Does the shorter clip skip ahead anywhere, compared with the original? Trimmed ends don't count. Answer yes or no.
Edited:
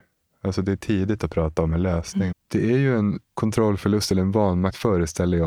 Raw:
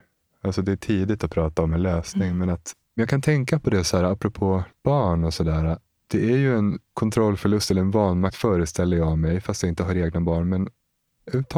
yes